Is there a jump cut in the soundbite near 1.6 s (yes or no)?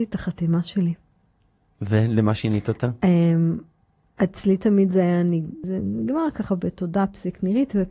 no